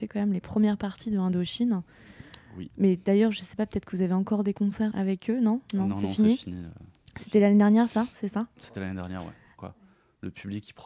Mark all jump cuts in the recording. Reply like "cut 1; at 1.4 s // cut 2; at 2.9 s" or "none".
cut 1; at 4.9 s // cut 2; at 9.6 s